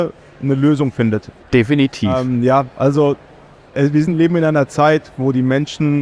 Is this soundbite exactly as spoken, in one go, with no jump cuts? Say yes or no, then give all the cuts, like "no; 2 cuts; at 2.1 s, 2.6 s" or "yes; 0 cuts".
no; 1 cut; at 1.4 s